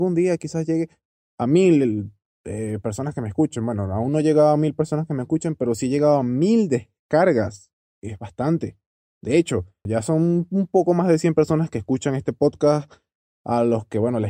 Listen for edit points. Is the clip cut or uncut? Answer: cut